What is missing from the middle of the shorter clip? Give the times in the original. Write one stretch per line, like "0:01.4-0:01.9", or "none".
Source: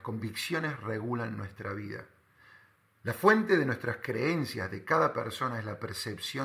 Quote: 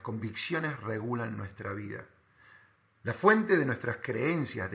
none